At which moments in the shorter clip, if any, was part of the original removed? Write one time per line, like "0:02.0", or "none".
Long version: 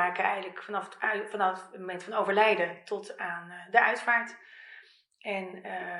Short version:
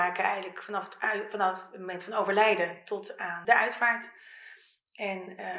0:03.4